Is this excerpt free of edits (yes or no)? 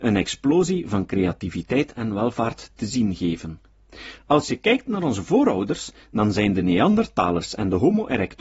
no